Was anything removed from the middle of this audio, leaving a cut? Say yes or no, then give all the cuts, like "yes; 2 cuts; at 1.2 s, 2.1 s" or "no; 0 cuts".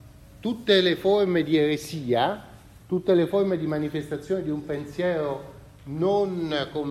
yes; 1 cut; at 2.8 s